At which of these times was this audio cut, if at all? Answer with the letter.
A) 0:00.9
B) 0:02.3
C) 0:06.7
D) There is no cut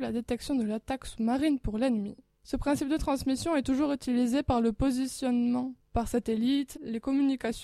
C